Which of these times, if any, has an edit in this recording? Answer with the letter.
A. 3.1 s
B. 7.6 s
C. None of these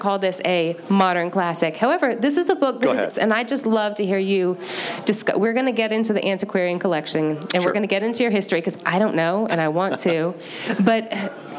A